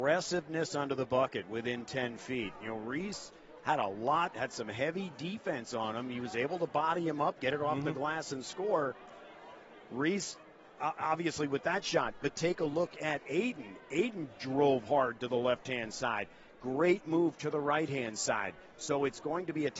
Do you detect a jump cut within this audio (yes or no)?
yes